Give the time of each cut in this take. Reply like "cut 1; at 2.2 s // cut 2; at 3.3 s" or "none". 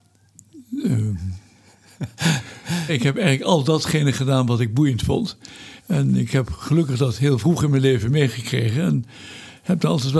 cut 1; at 2.9 s // cut 2; at 5.8 s